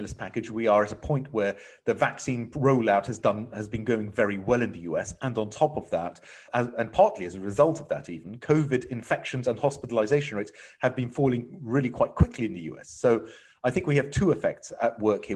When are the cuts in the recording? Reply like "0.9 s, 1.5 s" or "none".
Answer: 6.5 s